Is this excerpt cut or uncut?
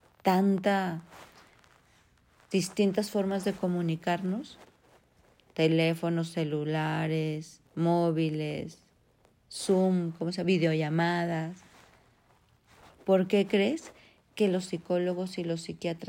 cut